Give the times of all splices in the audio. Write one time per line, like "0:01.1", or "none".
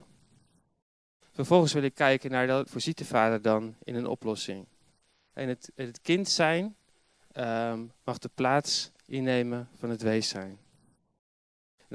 0:02.7